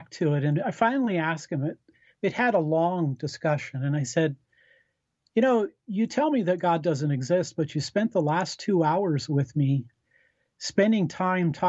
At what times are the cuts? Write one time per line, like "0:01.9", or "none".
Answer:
none